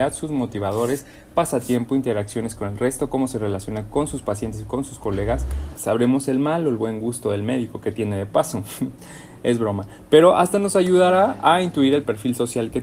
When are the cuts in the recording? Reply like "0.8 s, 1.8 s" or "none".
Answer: 5.7 s

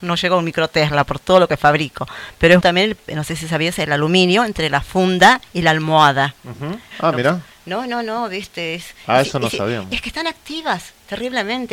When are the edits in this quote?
2.6 s, 6.9 s

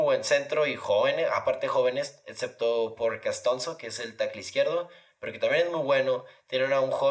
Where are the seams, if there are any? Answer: none

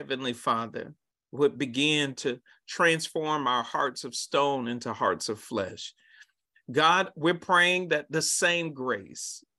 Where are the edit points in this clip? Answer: none

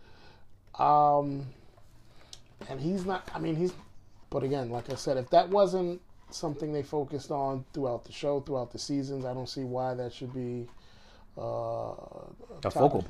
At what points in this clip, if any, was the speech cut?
4.2 s

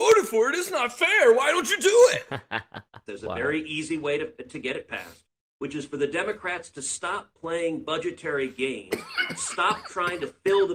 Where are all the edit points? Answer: 3.1 s

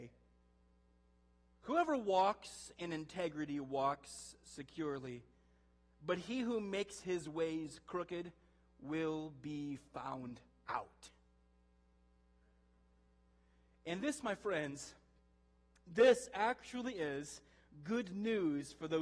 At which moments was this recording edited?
1.5 s

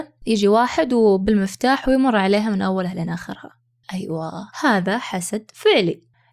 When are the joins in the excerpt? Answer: 4.5 s

